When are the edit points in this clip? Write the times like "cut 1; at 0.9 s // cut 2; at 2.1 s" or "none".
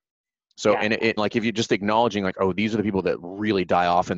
cut 1; at 1.2 s

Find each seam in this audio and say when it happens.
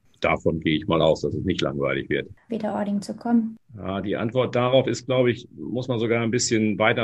cut 1; at 2.5 s

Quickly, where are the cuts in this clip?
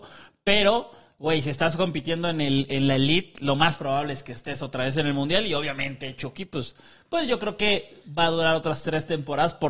none

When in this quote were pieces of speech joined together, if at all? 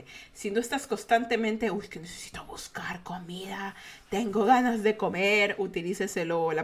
none

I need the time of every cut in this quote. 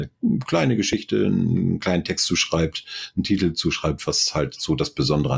none

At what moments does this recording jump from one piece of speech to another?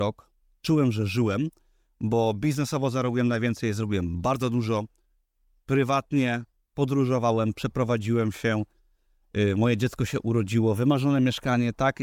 none

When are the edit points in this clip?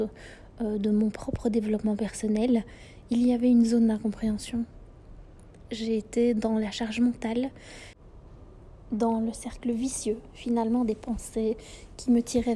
cut 1; at 5.7 s

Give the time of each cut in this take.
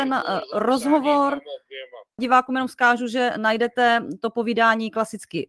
cut 1; at 2.2 s

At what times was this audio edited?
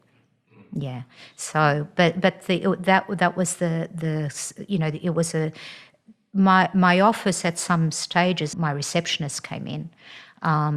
cut 1; at 8.5 s

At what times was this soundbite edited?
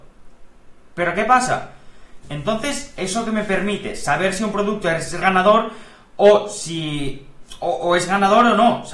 cut 1; at 2.2 s // cut 2; at 5.2 s

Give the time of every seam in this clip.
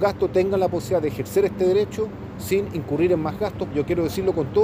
cut 1; at 3.7 s

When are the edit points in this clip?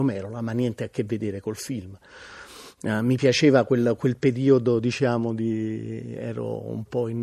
none

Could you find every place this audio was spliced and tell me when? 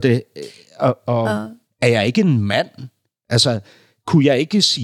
cut 1; at 1.7 s

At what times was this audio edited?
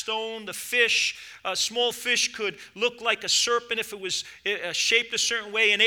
none

